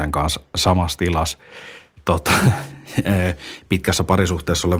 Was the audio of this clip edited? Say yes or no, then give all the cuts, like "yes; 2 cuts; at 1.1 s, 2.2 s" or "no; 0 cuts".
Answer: no; 0 cuts